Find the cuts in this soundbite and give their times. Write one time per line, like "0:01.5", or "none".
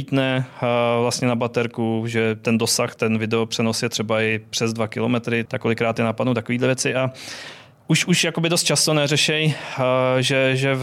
0:05.5